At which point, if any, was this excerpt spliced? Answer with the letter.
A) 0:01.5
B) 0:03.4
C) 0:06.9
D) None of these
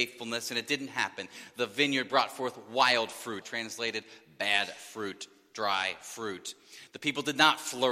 B